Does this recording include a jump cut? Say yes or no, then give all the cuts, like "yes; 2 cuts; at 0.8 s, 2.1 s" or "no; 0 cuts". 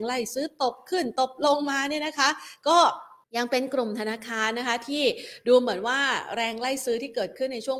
yes; 1 cut; at 3.2 s